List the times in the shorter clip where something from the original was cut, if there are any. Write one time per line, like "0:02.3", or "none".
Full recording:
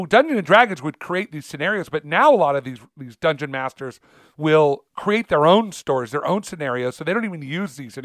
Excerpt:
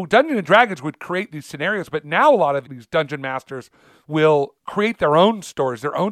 0:02.6